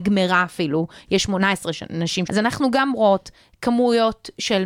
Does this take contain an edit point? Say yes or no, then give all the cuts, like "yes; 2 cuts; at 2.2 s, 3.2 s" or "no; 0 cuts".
yes; 1 cut; at 2.3 s